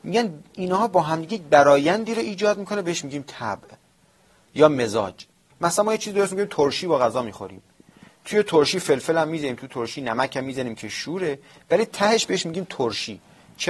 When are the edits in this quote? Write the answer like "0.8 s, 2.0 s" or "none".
none